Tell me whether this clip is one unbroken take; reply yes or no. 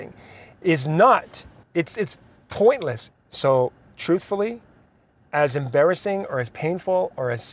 no